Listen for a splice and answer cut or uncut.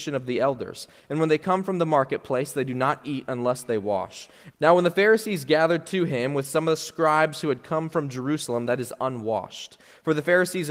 cut